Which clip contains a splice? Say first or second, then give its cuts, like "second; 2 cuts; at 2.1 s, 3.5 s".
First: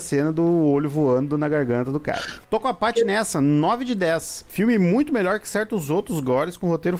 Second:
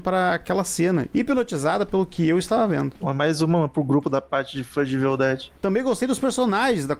second; 1 cut; at 1.1 s